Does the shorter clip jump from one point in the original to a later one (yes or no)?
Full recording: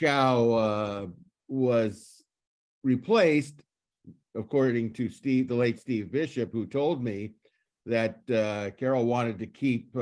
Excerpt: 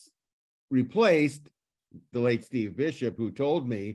yes